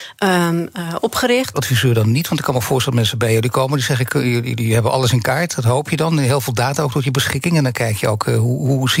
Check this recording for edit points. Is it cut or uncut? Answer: cut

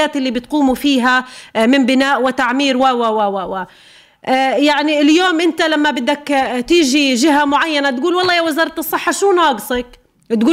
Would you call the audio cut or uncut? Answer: uncut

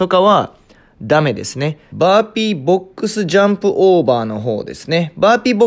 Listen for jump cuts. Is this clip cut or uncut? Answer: cut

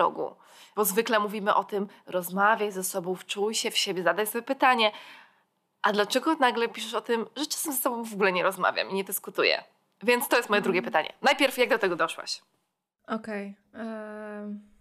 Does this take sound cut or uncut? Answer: uncut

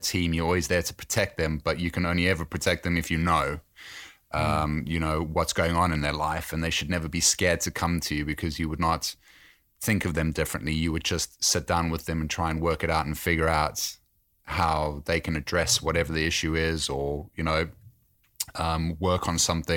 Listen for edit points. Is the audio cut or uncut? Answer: uncut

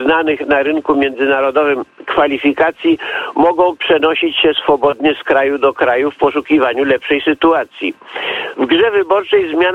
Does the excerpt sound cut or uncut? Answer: cut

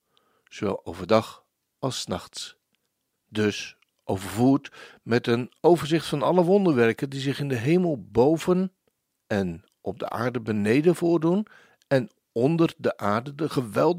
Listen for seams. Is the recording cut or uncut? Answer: cut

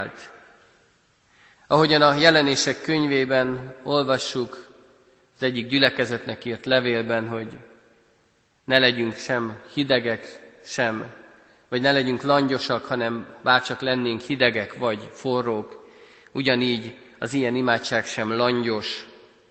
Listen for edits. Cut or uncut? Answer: cut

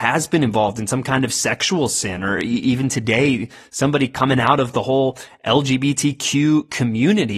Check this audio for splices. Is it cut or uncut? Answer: uncut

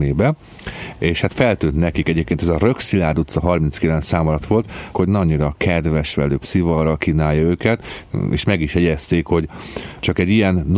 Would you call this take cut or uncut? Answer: cut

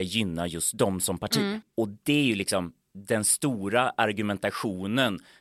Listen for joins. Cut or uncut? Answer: cut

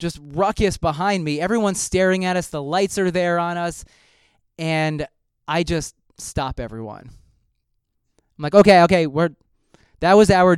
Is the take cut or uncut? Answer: uncut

